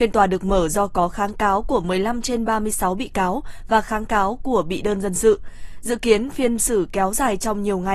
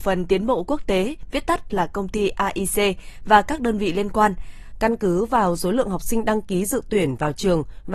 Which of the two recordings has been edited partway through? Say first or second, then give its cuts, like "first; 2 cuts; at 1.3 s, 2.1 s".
second; 1 cut; at 4.7 s